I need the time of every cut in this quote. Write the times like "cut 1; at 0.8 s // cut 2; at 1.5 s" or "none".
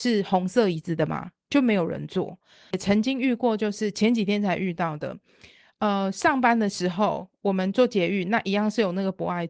cut 1; at 2.7 s